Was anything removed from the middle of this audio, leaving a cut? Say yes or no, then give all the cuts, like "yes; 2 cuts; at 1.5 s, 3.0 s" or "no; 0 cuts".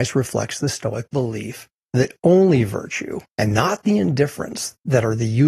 no; 0 cuts